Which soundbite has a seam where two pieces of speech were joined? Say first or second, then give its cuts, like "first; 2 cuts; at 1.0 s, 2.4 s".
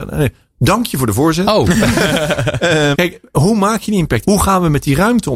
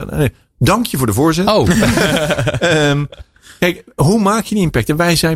first; 2 cuts; at 2.9 s, 4.2 s